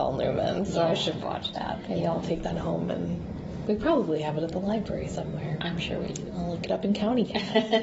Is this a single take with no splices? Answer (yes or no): no